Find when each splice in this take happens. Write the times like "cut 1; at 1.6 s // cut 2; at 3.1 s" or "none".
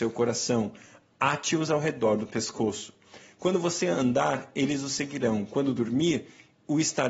none